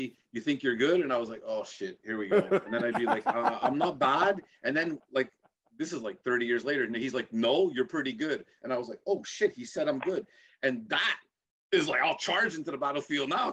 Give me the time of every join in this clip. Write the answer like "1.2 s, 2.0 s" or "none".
none